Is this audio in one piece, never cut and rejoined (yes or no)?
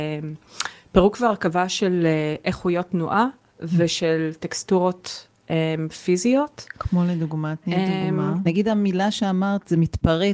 no